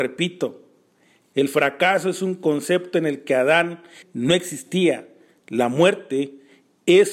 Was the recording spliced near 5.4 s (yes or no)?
no